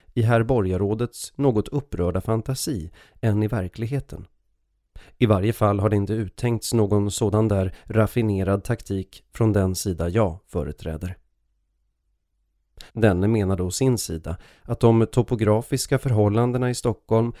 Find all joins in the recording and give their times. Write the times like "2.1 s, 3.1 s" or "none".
12.9 s